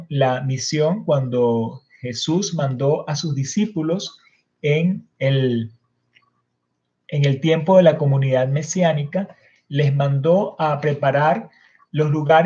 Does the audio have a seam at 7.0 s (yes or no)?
no